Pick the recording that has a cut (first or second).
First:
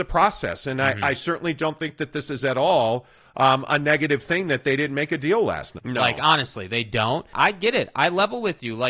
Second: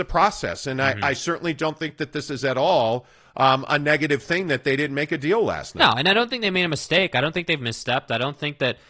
first